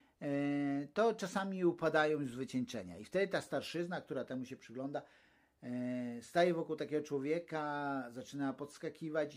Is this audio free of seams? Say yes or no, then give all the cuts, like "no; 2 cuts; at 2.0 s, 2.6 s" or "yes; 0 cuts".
yes; 0 cuts